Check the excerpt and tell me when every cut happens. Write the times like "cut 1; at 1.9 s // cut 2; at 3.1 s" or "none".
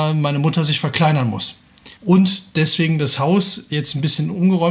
cut 1; at 2.0 s